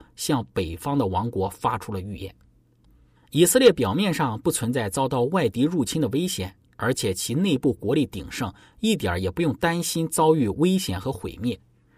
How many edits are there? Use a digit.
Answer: 1